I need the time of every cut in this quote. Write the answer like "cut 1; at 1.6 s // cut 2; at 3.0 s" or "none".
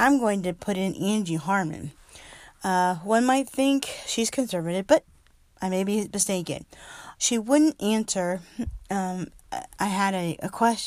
cut 1; at 7.2 s